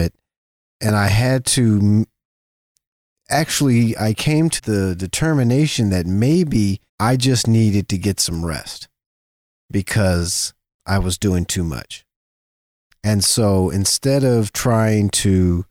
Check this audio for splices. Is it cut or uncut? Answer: cut